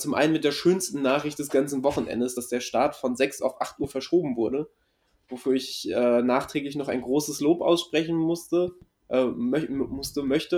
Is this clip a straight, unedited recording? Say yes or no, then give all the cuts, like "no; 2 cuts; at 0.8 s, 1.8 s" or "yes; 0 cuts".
yes; 0 cuts